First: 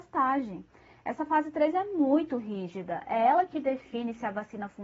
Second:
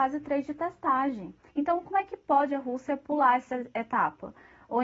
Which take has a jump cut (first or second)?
second